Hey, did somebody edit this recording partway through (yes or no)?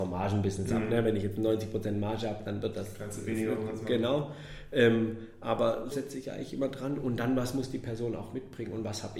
yes